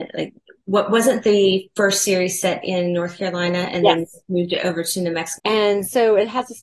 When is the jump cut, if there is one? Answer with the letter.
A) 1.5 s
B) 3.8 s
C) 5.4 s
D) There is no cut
C